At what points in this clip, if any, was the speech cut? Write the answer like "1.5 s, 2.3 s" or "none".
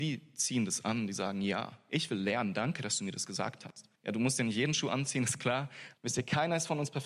4.0 s, 5.9 s